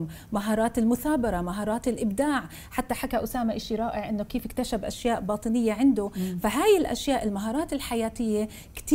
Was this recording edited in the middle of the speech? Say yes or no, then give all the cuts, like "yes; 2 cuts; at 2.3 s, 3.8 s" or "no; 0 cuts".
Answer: no; 0 cuts